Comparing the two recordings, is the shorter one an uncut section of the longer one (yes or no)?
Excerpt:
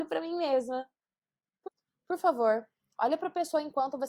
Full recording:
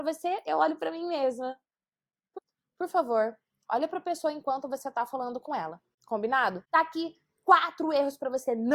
yes